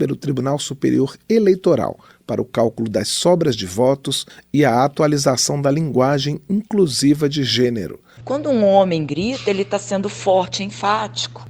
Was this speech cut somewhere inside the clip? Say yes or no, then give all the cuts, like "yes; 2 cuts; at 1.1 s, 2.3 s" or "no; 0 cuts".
yes; 1 cut; at 8.2 s